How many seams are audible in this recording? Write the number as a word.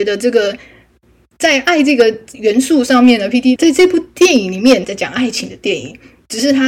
two